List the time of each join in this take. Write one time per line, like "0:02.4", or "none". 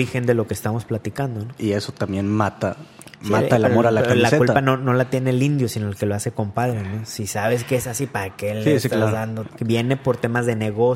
0:09.5